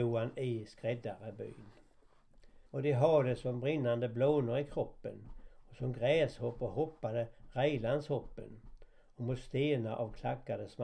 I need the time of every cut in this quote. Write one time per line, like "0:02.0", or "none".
0:02.7